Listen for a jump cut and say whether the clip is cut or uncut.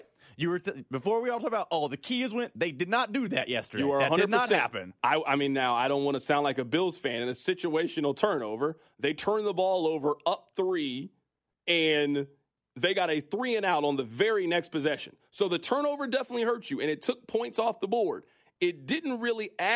uncut